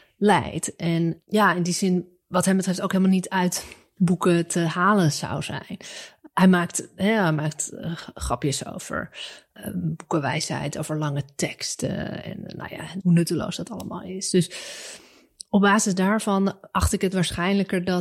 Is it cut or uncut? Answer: cut